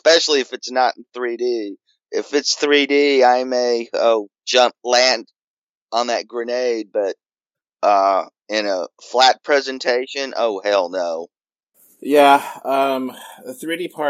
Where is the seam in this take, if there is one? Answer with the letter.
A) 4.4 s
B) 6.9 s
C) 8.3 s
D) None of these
A